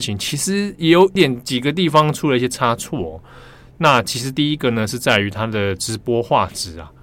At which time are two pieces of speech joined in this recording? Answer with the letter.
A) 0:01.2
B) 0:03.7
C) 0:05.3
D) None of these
A